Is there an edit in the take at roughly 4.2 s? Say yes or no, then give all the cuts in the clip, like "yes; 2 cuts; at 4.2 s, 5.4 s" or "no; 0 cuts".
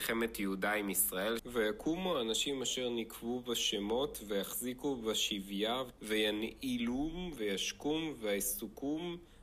no; 3 cuts; at 1.4 s, 6.0 s, 7.4 s